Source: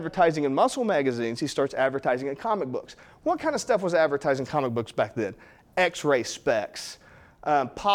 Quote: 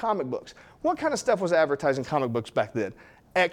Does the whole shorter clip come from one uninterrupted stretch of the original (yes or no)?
yes